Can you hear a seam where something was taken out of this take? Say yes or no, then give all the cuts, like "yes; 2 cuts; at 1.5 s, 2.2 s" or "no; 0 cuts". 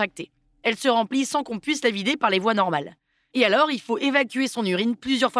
no; 0 cuts